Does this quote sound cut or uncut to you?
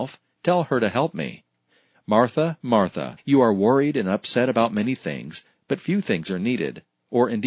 cut